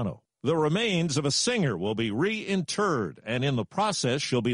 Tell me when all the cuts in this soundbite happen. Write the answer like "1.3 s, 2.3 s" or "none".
none